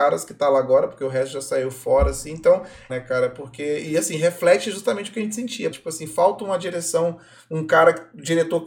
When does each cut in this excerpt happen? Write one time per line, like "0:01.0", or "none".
0:02.9
0:05.7